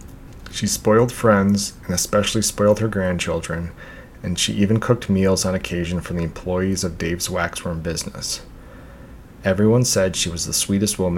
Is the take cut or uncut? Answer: uncut